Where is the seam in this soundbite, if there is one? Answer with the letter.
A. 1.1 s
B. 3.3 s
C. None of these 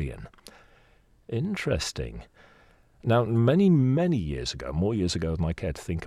C